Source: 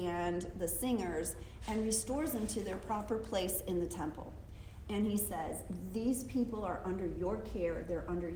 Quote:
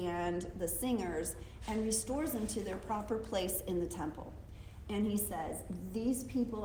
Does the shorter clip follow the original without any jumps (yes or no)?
yes